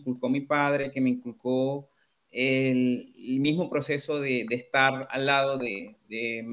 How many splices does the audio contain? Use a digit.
0